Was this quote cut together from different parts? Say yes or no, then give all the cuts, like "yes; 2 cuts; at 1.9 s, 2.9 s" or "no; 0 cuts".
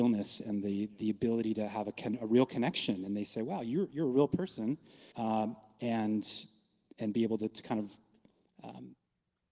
yes; 1 cut; at 5.1 s